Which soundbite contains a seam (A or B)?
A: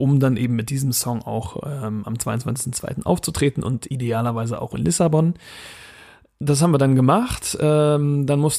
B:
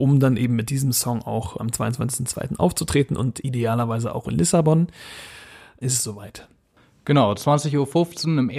B